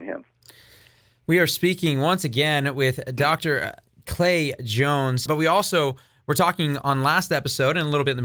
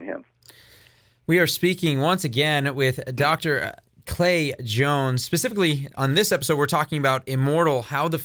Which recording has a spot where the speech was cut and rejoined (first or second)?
first